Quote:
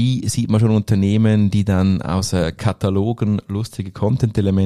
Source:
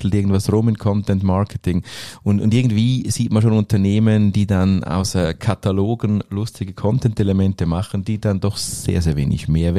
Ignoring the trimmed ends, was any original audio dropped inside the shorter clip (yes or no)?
no